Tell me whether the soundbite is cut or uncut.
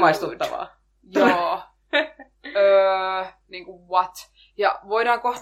uncut